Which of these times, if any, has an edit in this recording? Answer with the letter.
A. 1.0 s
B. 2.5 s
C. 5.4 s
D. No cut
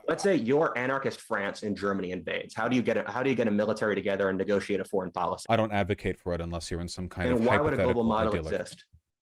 C